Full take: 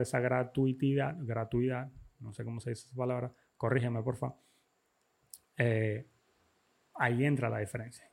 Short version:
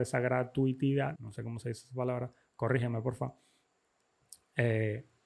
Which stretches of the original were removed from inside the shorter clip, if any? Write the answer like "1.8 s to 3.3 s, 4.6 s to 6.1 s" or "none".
1.2 s to 2.2 s